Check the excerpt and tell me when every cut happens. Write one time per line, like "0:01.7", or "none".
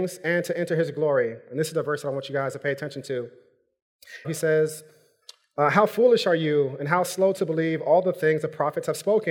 0:04.2